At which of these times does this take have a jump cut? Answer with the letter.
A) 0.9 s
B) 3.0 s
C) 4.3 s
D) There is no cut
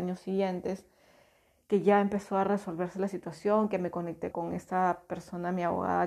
C